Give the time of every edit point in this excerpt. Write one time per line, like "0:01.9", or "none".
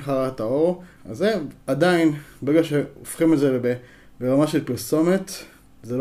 0:01.0